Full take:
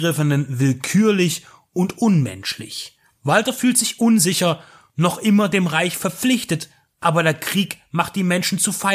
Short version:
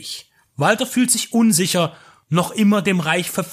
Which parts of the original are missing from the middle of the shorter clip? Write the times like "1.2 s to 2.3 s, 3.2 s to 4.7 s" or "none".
none